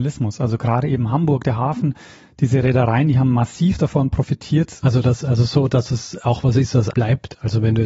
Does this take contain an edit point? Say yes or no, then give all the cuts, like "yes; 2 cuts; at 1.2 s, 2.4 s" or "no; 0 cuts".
yes; 2 cuts; at 4.8 s, 6.9 s